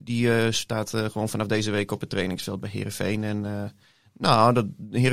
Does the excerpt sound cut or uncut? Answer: uncut